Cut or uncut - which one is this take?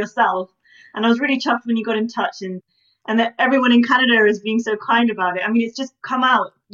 uncut